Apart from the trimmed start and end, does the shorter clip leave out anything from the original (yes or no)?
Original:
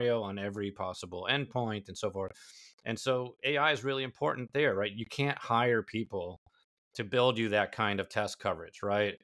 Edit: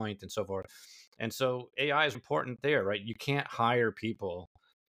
yes